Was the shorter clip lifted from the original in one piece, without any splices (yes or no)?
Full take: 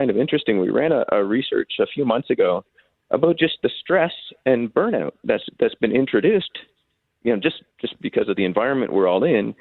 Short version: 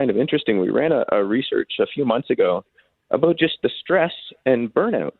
yes